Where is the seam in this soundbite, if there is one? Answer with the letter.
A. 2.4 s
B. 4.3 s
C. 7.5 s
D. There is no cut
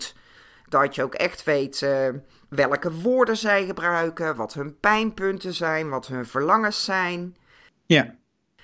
D